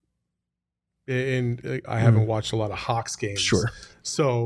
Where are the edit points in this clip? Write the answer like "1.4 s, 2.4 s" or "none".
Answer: 1.8 s